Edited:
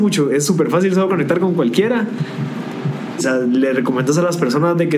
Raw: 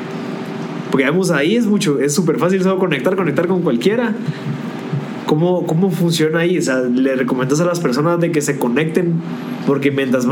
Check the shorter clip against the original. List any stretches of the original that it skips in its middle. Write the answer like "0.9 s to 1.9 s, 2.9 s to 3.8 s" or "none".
2.8 s to 3.1 s, 5.2 s to 6.6 s